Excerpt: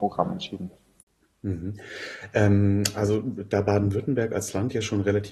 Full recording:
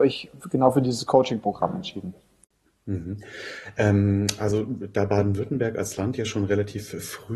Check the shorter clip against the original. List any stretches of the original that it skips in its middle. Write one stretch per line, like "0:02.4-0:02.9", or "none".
none